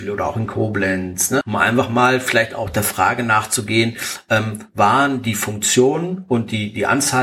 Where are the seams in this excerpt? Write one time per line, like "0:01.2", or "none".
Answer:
0:01.4